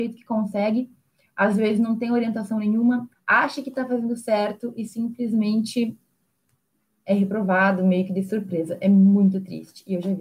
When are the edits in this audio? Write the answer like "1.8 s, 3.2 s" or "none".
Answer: 3.1 s

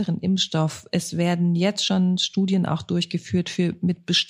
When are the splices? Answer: none

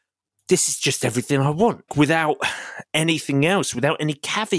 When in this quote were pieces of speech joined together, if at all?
1.9 s

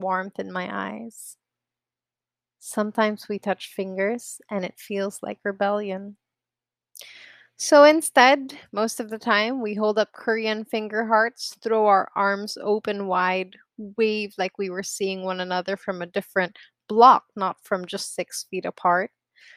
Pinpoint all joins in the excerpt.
none

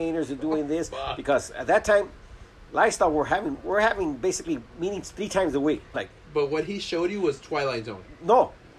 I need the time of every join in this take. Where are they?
5.9 s

